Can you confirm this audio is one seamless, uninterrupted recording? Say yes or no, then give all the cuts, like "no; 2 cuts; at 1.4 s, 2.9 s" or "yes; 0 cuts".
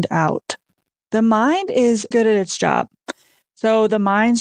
no; 2 cuts; at 1.0 s, 2.1 s